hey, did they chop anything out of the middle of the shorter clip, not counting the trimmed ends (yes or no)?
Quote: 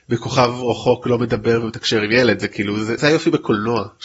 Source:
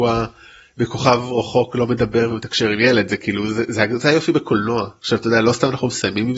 yes